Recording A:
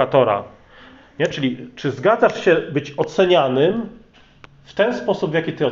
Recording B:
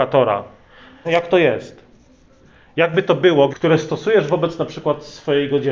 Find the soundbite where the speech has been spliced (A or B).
B